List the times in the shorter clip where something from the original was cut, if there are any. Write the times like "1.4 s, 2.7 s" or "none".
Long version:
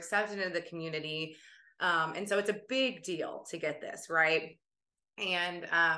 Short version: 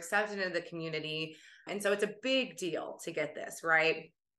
1.7 s